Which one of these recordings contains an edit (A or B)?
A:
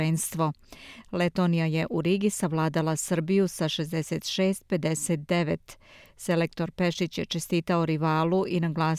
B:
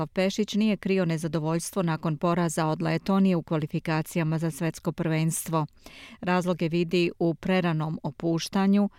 A